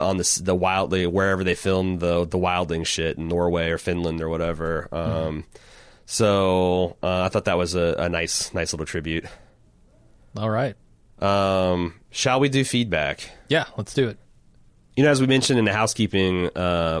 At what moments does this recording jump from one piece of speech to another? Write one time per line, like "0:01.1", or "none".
none